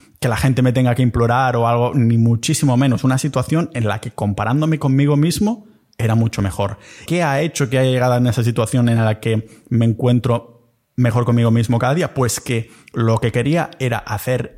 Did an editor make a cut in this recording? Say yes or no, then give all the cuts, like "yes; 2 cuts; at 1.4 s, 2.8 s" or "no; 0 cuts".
yes; 1 cut; at 7.1 s